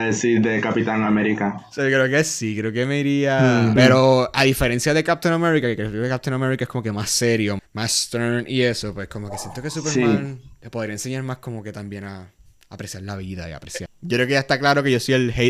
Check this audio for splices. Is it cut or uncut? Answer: cut